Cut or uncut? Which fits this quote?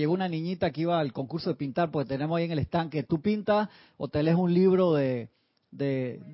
uncut